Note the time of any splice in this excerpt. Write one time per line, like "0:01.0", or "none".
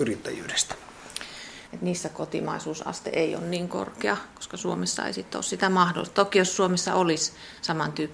0:01.7